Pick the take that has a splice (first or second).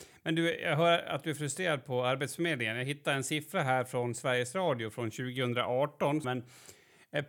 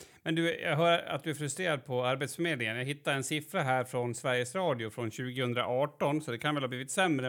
first